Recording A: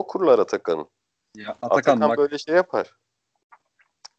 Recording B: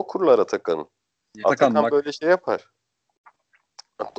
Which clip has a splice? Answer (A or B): B